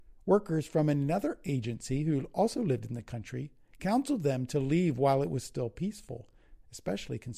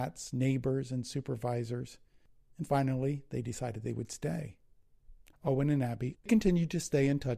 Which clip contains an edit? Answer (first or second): second